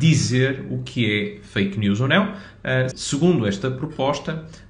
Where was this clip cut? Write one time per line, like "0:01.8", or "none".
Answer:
0:02.9